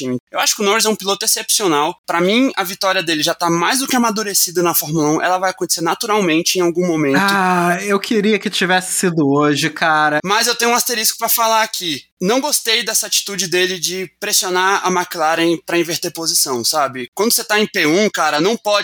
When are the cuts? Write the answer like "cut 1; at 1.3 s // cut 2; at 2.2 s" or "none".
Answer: cut 1; at 10.2 s // cut 2; at 17.1 s